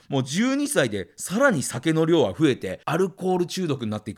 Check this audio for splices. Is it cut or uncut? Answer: cut